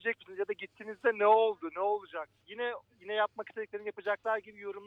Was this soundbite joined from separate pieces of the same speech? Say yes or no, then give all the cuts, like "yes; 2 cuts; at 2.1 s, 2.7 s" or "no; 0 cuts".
no; 0 cuts